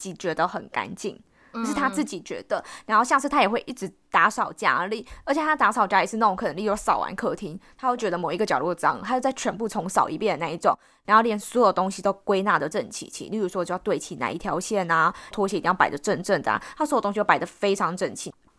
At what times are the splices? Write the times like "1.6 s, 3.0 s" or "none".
12.7 s, 15.3 s